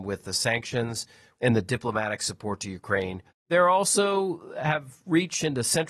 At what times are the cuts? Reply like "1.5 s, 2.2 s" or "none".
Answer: 1.3 s, 3.3 s